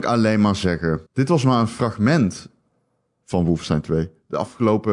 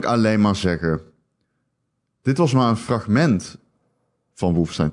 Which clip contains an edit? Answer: first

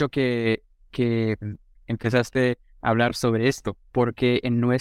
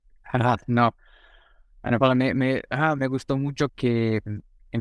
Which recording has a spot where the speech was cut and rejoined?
second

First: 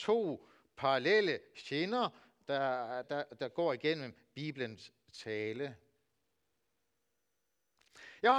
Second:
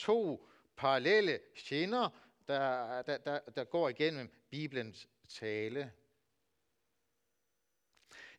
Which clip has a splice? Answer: first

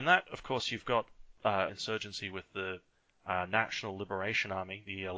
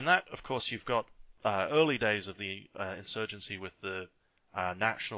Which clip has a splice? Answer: first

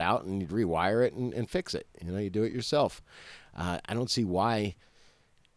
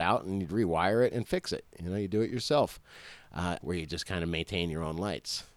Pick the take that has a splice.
second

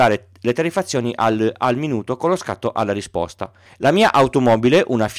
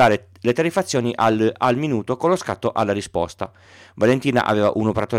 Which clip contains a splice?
first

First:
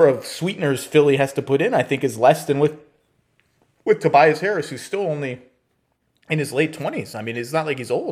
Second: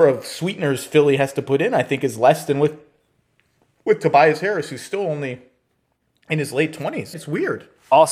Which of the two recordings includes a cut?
second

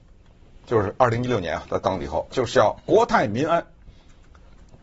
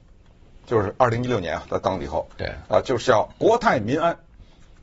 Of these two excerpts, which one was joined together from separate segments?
first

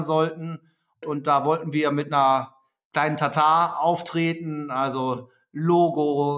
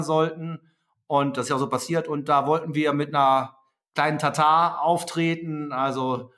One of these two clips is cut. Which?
first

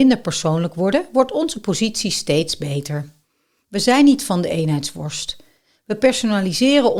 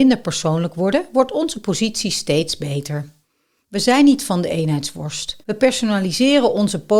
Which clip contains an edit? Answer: second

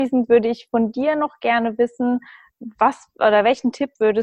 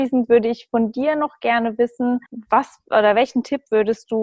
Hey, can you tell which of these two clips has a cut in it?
second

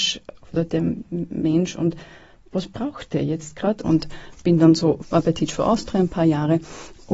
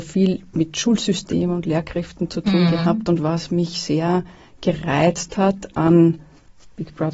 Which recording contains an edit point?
first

